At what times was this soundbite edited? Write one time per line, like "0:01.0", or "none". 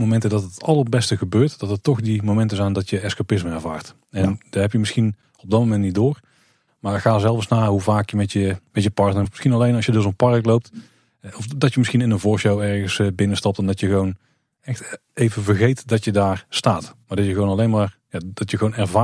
0:09.2